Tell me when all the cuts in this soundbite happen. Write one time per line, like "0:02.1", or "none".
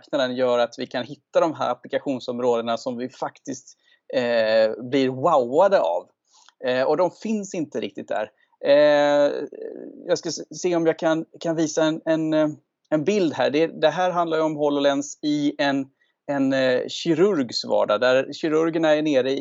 none